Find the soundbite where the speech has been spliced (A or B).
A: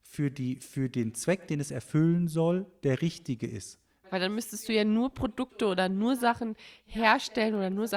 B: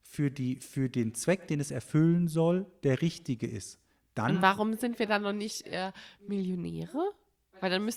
A